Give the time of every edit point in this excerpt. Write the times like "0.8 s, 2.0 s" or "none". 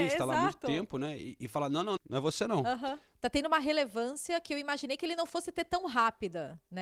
2.0 s, 3.1 s